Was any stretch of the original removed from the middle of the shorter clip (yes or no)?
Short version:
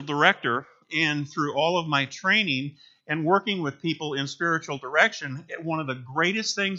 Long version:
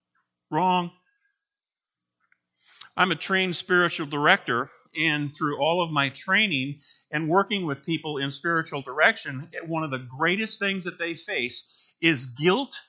no